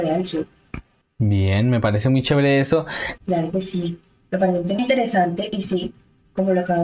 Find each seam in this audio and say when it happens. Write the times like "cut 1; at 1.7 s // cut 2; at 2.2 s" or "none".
cut 1; at 3.2 s // cut 2; at 4.8 s